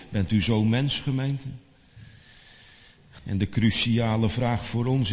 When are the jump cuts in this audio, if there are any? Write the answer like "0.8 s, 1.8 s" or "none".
3.2 s